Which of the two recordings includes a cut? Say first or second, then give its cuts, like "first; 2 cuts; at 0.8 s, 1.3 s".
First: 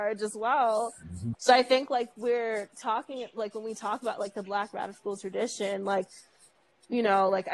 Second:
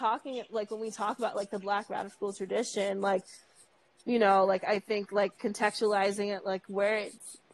first; 1 cut; at 1.3 s